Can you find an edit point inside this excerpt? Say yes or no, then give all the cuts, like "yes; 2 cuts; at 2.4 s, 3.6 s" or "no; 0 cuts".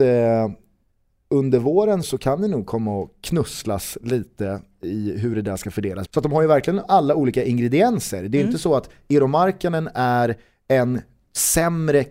yes; 2 cuts; at 2.0 s, 6.1 s